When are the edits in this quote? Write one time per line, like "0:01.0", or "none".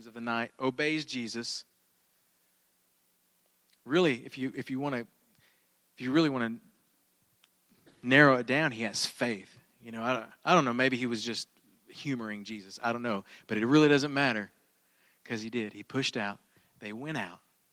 none